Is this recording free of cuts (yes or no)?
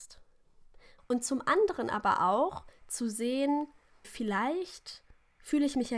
no